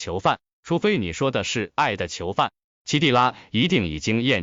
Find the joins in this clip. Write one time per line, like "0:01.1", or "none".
none